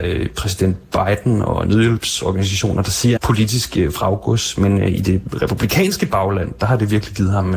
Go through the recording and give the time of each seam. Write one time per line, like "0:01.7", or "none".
0:03.2